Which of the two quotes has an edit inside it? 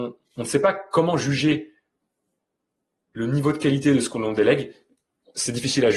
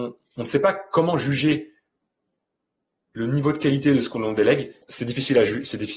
second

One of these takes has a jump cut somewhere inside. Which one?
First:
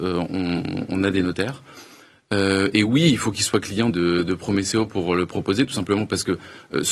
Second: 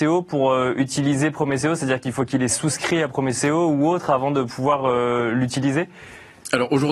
first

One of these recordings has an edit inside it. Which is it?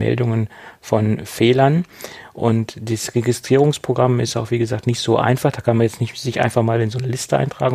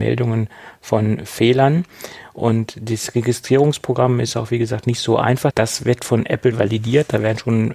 second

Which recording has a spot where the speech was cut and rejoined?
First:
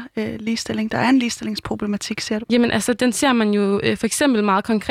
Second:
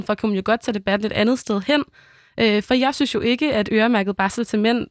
first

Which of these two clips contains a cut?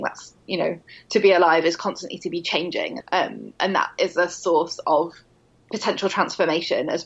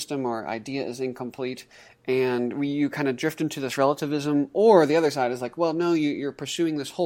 first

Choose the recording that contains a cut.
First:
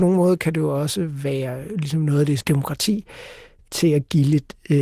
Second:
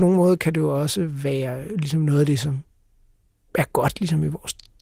first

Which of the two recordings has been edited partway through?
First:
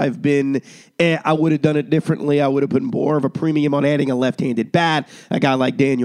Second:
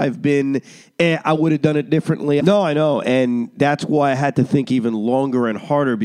second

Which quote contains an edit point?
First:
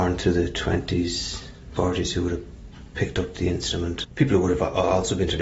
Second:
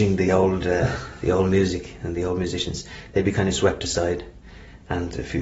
first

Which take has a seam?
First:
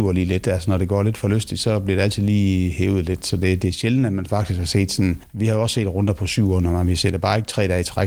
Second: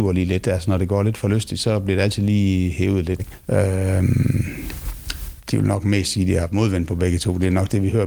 second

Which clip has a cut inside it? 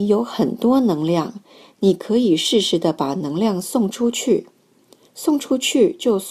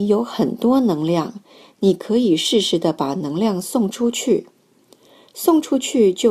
first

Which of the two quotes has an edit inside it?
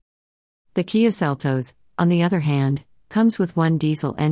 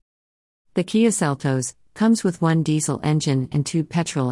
second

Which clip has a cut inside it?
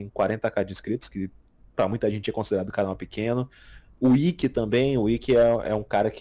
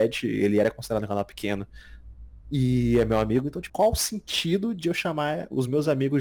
second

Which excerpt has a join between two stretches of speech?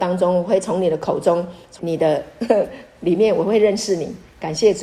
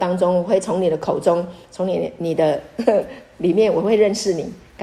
first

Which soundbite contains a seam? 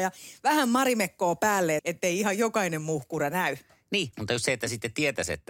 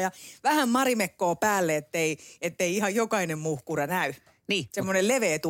first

